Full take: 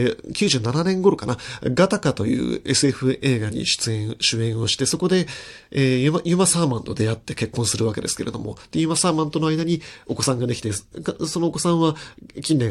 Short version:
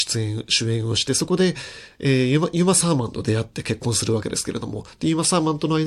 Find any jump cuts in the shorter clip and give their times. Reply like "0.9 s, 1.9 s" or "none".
none